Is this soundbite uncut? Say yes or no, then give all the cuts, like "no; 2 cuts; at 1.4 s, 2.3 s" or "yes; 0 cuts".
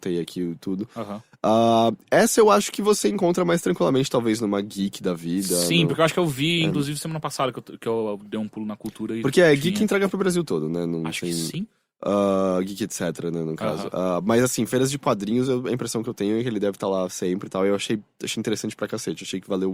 yes; 0 cuts